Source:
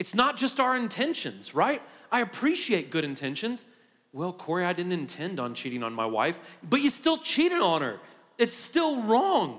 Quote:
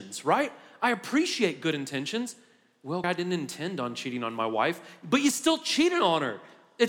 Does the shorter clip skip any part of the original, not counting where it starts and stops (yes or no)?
yes